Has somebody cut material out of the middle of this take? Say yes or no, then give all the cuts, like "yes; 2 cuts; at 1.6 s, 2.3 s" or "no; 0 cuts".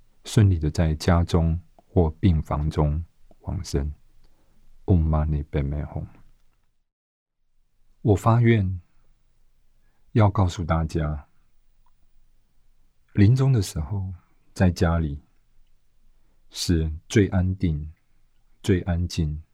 no; 0 cuts